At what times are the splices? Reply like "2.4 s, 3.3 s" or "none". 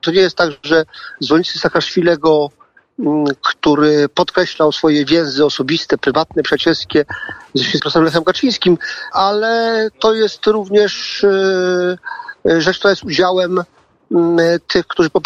7.8 s, 9.1 s